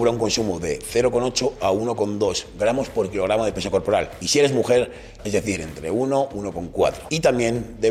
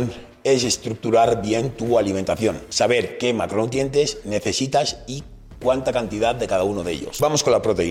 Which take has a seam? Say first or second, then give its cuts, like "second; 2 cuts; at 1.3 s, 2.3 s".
first; 1 cut; at 5.2 s